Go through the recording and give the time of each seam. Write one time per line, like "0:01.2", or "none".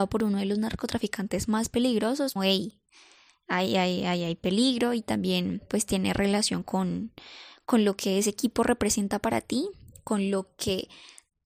0:02.4